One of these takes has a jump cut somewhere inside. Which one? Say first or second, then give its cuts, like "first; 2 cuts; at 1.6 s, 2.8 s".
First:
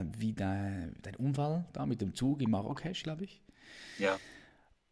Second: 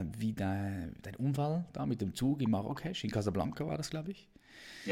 first; 1 cut; at 3.0 s